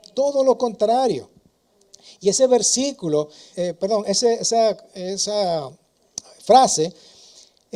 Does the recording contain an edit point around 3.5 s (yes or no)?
yes